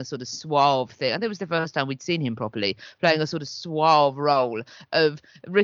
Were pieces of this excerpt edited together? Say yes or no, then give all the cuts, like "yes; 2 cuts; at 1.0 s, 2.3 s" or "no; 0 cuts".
no; 0 cuts